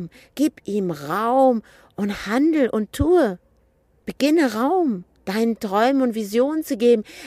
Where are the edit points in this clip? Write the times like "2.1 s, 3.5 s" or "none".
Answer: none